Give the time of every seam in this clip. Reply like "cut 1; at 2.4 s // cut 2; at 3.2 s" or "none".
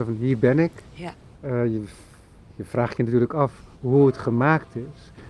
cut 1; at 1.3 s // cut 2; at 3.7 s